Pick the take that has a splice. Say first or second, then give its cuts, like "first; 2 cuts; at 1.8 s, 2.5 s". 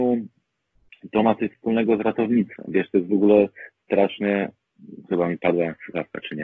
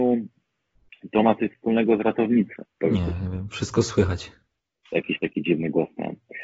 second; 1 cut; at 2.6 s